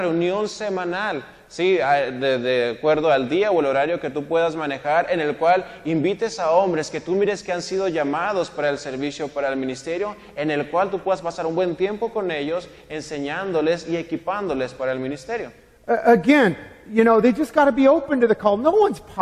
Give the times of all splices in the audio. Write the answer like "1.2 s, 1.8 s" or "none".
none